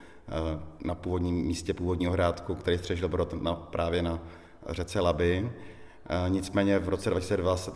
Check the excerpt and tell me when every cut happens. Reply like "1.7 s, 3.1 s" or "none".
none

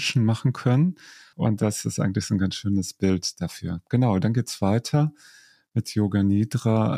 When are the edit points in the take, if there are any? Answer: 1.3 s

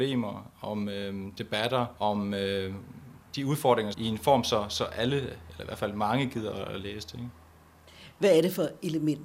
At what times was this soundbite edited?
2.0 s, 3.9 s

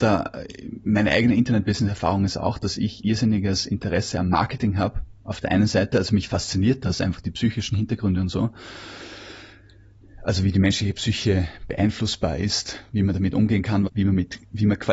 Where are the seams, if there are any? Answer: 13.9 s

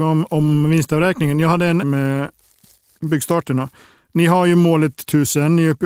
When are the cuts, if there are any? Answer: 1.8 s

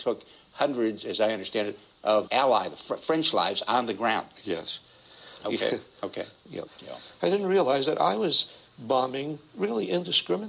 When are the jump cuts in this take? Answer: 2.3 s, 5.4 s, 6.7 s

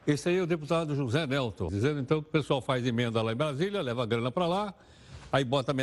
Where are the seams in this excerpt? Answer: 1.7 s

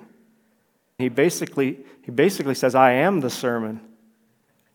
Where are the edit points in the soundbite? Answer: 1.0 s

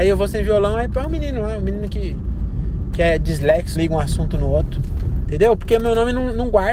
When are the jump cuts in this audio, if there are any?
3.7 s, 5.2 s

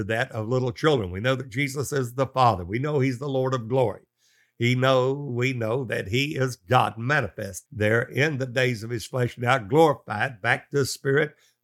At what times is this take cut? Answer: 7.7 s

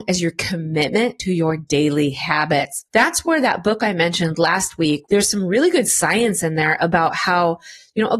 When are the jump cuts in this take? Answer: 2.9 s, 5.1 s

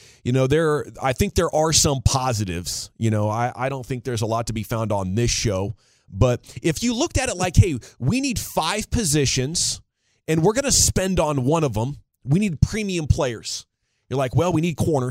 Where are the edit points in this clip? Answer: none

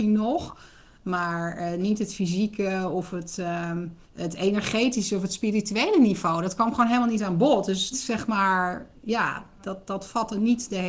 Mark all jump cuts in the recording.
4.0 s, 7.9 s

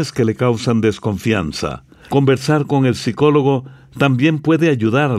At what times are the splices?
2.0 s

